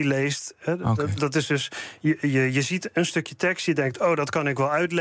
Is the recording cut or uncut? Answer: uncut